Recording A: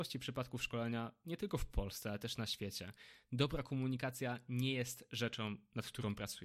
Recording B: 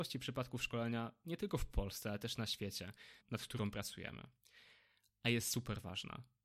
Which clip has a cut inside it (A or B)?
B